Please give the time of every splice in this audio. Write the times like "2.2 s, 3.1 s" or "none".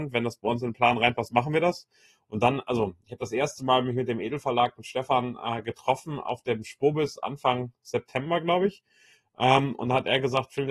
none